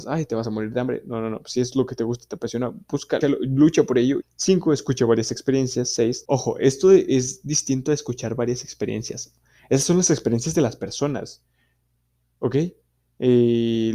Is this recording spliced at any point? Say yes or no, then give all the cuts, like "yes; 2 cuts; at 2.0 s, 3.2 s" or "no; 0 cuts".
yes; 3 cuts; at 3.2 s, 4.2 s, 6.3 s